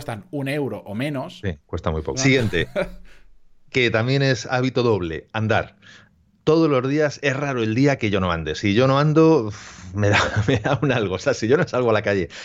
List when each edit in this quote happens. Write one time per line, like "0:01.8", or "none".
0:02.1